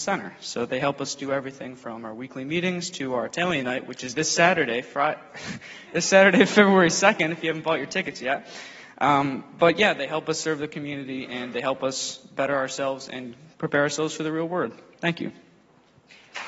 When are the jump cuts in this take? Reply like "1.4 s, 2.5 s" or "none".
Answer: none